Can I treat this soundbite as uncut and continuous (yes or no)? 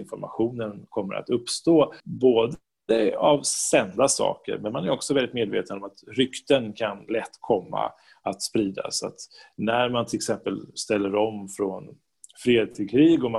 no